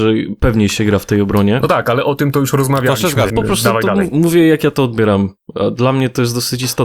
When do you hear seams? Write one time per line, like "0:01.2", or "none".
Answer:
0:03.3

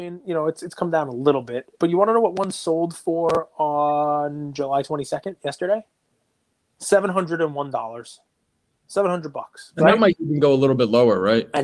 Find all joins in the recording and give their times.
none

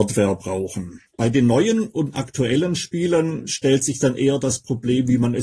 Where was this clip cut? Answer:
0:01.1

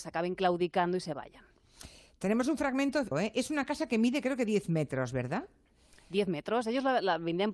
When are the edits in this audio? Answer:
0:03.1

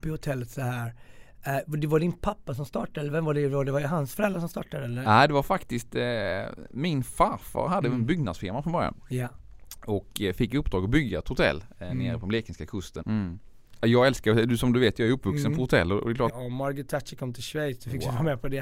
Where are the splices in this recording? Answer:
0:13.0
0:16.3

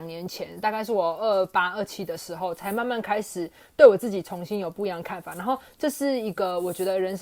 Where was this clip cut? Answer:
none

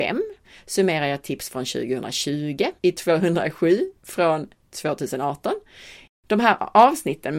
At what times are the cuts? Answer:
0:02.8
0:06.1

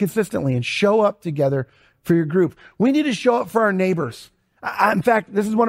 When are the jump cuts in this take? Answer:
none

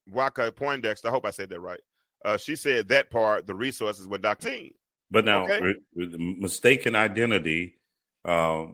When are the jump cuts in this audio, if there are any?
0:04.4

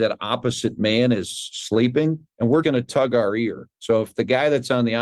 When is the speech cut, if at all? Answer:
0:02.6

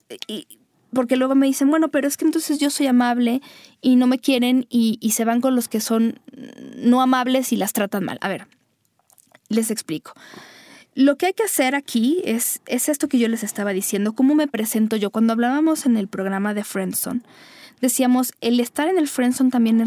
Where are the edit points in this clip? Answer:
none

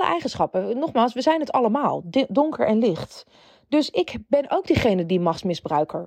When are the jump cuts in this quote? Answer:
none

